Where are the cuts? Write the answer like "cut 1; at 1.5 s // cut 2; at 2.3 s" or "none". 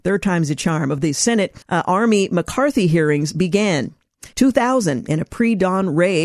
cut 1; at 1.6 s // cut 2; at 4.3 s